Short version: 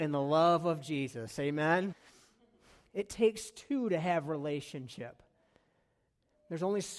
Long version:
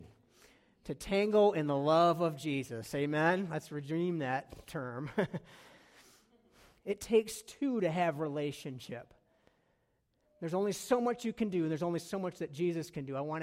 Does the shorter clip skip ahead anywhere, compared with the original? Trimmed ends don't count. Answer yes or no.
yes